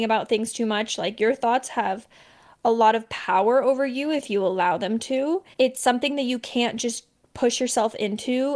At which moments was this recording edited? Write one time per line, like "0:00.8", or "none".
0:05.5